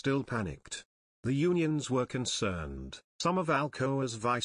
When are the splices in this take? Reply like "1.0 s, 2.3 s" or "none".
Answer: 3.1 s